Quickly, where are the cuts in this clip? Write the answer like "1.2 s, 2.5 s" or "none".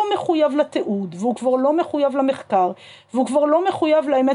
none